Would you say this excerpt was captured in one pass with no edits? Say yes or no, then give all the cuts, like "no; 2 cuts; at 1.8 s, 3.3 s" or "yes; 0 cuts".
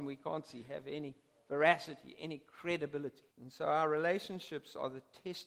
no; 1 cut; at 3.3 s